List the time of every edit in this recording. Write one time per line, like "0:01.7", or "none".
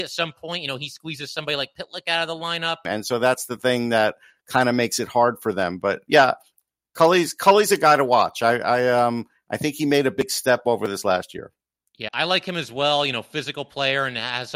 0:02.8
0:12.1

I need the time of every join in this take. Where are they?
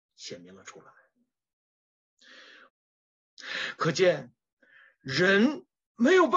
0:02.7

